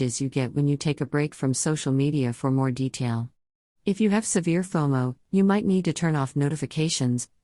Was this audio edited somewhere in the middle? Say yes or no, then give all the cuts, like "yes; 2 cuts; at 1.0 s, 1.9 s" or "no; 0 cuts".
no; 0 cuts